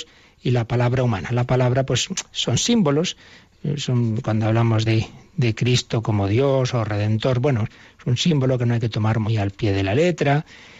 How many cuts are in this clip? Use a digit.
0